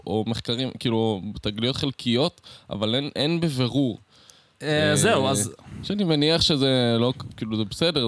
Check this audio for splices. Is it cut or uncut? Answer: cut